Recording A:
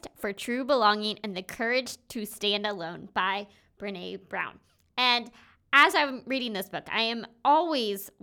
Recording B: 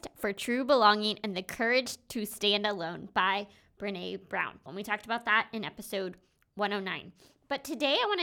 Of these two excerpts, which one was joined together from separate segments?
B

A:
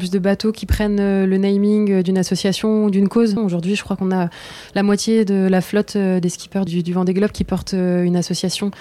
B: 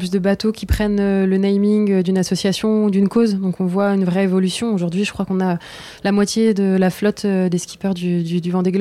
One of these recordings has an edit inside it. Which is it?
A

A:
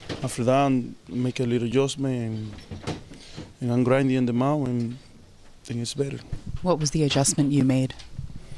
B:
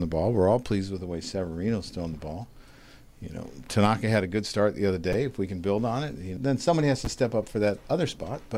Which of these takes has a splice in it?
B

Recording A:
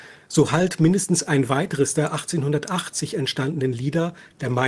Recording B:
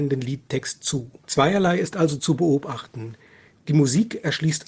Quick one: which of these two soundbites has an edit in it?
B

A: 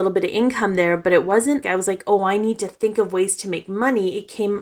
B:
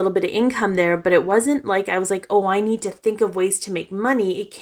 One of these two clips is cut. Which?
A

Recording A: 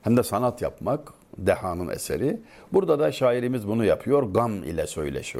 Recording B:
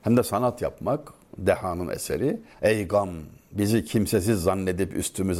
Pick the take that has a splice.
B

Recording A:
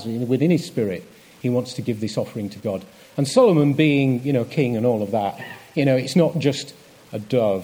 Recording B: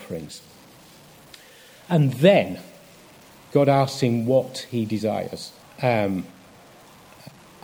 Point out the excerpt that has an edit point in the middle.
B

